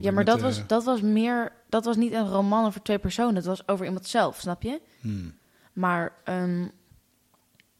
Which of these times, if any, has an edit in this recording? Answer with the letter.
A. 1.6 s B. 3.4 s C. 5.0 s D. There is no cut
D